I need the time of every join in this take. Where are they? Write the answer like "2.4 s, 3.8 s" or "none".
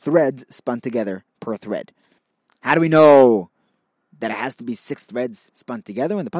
none